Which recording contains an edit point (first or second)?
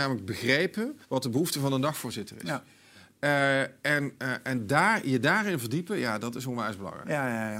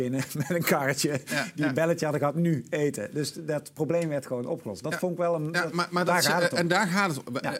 first